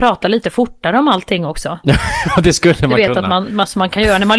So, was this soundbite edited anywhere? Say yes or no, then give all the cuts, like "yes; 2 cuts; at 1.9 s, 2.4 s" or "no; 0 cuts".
no; 0 cuts